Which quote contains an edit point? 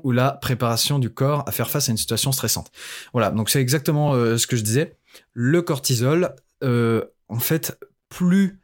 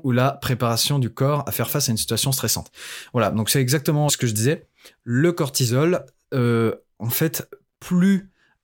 second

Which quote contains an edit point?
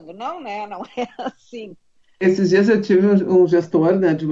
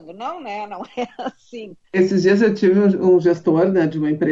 second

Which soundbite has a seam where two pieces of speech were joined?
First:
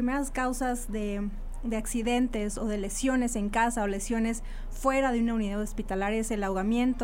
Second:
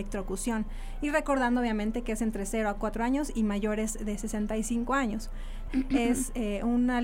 second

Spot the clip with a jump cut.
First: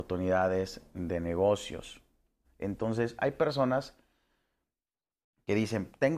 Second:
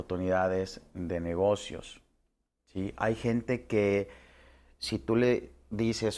first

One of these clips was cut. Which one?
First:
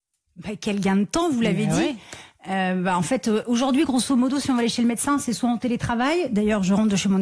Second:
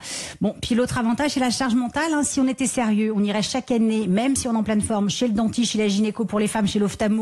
second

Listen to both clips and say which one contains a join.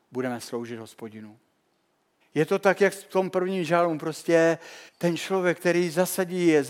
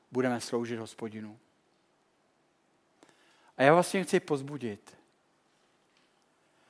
first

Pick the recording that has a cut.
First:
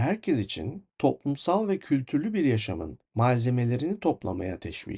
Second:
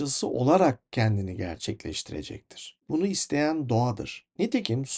second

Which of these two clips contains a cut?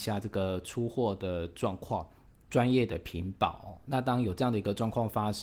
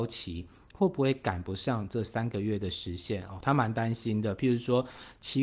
first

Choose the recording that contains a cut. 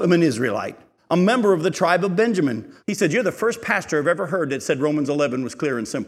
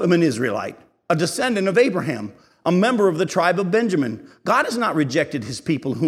first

